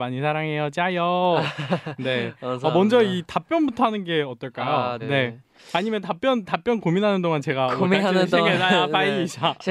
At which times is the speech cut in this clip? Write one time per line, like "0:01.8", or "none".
0:05.0